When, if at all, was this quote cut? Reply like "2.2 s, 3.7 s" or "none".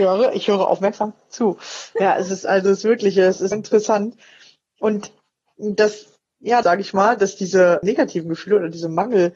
3.5 s, 6.6 s, 7.8 s